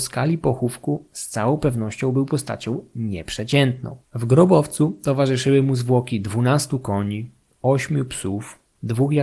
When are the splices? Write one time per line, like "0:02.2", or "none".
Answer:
0:04.0